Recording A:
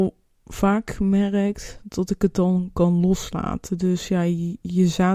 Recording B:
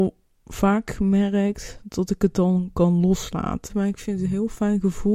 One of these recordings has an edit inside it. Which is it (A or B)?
B